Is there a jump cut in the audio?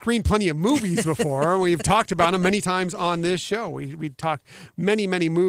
no; 0 cuts

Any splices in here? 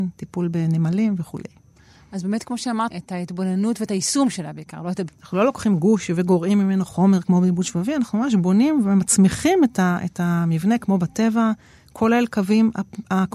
yes; 2 cuts; at 2.9 s, 5.1 s

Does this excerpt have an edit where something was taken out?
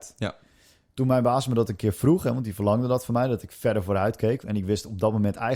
yes; 1 cut; at 4.4 s

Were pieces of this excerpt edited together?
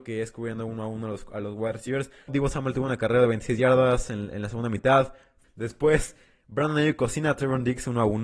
yes; 2 cuts; at 2.3 s, 5.4 s

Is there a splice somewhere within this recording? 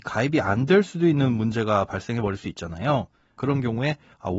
yes; 1 cut; at 3.4 s

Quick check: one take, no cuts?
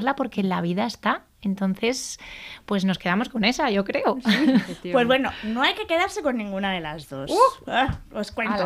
yes; 0 cuts

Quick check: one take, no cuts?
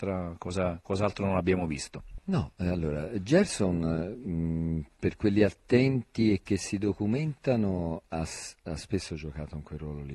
yes; 0 cuts

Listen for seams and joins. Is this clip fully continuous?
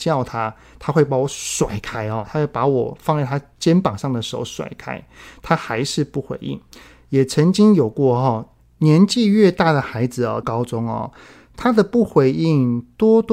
no; 2 cuts; at 8.6 s, 10.4 s

